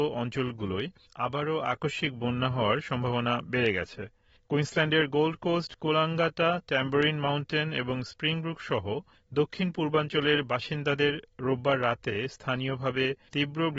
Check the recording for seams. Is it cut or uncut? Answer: uncut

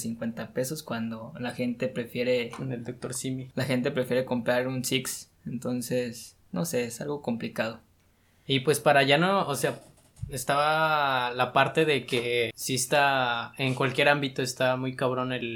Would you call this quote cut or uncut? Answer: cut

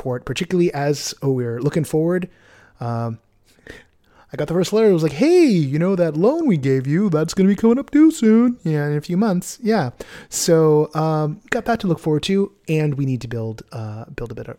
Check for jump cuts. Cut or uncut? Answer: uncut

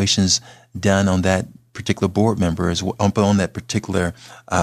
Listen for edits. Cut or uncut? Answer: cut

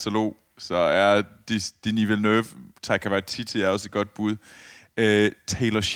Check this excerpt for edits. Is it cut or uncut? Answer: uncut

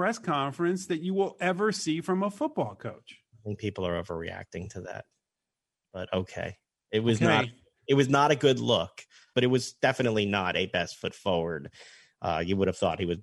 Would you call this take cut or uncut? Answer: cut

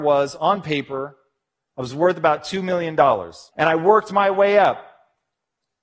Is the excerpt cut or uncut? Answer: cut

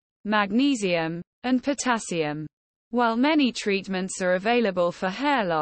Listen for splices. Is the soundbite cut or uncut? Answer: cut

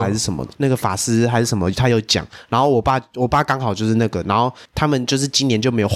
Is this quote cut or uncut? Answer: uncut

